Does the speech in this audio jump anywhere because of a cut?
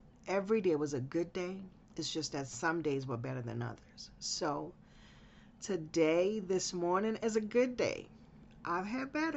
no; 0 cuts

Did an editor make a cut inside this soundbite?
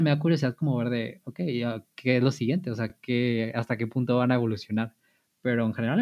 no; 0 cuts

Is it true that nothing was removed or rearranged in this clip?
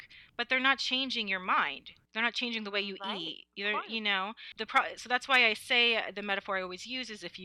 yes; 0 cuts

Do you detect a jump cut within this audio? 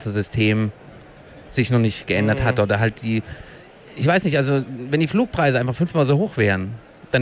no; 0 cuts

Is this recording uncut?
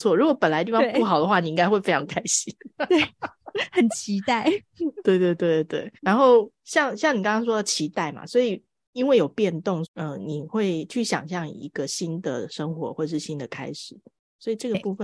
no; 2 cuts; at 6.0 s, 9.8 s

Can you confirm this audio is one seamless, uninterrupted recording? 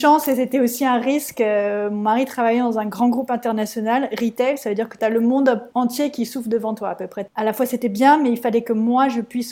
yes; 0 cuts

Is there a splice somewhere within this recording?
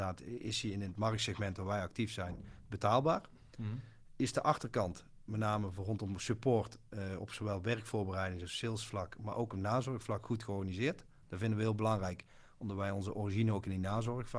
no; 0 cuts

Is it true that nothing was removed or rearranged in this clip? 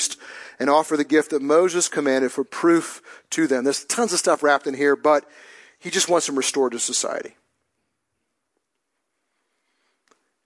yes; 0 cuts

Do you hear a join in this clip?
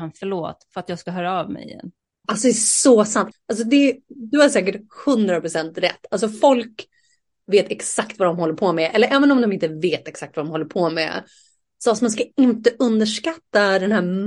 yes; 2 cuts; at 2.2 s, 3.3 s

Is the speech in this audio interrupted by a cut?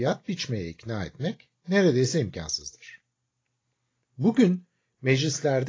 no; 0 cuts

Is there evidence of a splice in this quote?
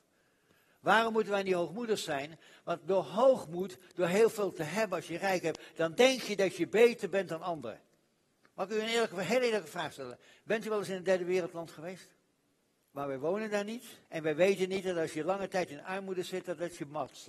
yes; 2 cuts; at 12.8 s, 14.0 s

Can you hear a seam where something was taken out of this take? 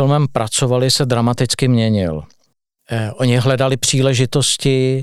no; 0 cuts

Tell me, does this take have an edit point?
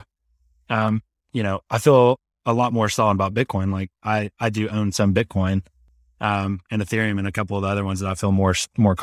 no; 0 cuts

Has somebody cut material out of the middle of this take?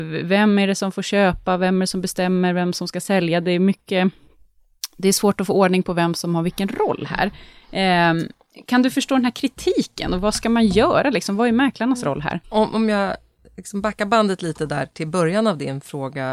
yes; 1 cut; at 12.4 s

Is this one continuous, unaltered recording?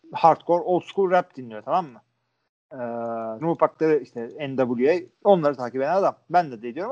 no; 2 cuts; at 3.4 s, 5.1 s

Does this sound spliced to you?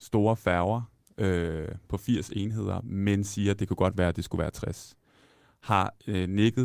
no; 0 cuts

